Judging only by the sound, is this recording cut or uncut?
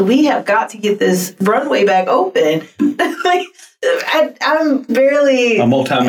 cut